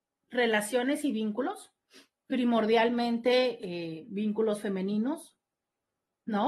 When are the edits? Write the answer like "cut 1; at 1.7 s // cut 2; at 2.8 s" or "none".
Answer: none